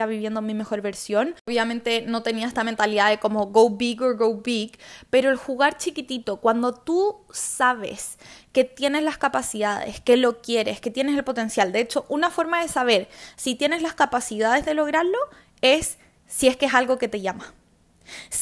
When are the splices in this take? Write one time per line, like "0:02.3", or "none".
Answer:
none